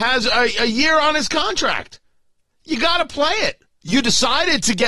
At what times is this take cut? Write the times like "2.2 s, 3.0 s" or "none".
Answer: 3.8 s